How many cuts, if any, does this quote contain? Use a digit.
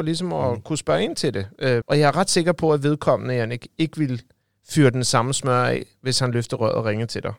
1